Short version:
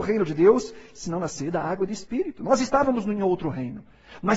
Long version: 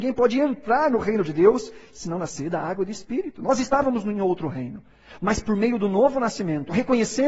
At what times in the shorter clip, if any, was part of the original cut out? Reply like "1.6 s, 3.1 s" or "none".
none